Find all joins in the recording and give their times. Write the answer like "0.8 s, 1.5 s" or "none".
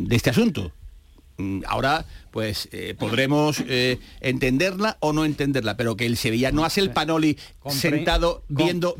none